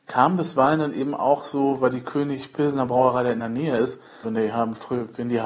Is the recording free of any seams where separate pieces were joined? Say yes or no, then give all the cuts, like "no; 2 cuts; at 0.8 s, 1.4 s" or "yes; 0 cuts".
no; 1 cut; at 4.2 s